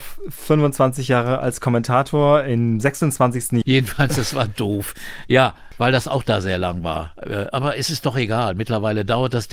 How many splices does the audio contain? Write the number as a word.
one